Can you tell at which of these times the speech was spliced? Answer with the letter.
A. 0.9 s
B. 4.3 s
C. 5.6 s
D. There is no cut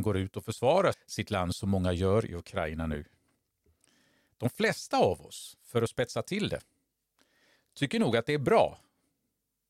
A